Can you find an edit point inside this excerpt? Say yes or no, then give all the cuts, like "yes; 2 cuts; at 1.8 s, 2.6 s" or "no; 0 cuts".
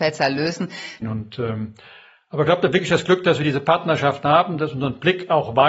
yes; 1 cut; at 1.0 s